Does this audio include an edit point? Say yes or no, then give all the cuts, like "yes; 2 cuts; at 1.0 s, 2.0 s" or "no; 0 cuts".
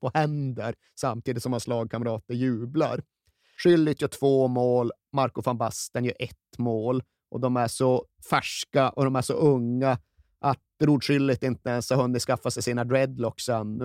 yes; 1 cut; at 3.6 s